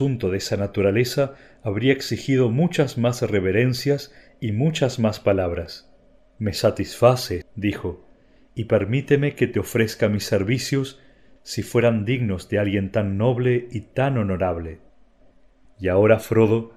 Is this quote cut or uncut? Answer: cut